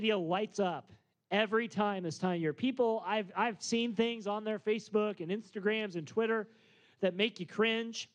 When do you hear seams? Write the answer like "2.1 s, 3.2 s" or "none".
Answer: none